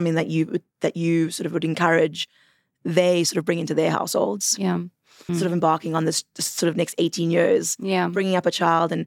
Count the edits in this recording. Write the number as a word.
one